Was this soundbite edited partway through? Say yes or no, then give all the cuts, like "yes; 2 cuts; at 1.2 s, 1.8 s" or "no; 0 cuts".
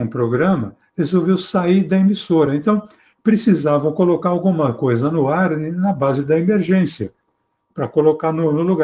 no; 0 cuts